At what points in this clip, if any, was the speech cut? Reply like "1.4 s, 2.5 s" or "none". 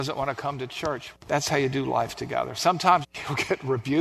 1.1 s, 3.0 s